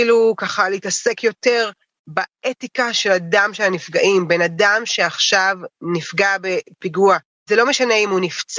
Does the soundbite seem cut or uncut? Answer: uncut